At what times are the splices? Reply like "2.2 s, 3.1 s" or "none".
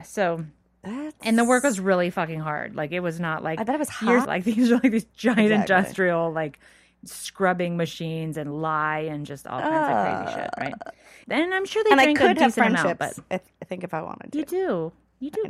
4.2 s, 11.2 s